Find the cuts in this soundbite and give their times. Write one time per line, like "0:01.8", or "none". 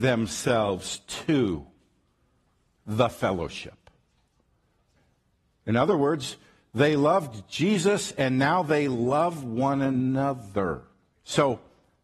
0:11.1

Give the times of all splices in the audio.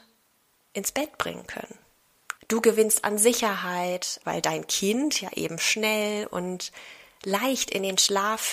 0:02.4
0:04.2

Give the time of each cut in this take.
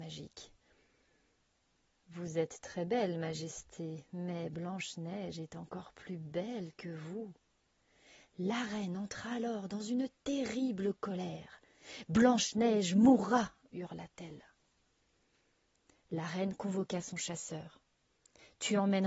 none

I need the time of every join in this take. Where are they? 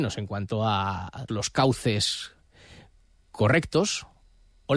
0:01.3

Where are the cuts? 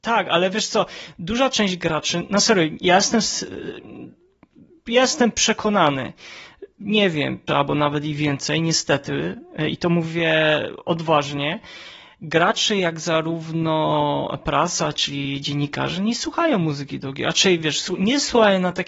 0:07.5

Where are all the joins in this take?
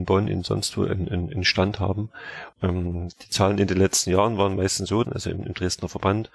0:02.5
0:05.0

